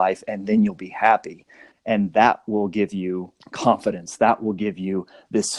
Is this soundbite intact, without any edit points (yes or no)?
no